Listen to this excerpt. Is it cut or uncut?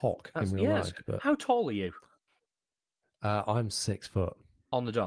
uncut